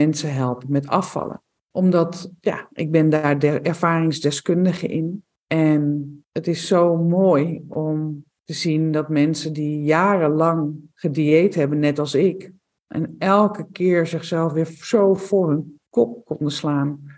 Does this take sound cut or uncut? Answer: uncut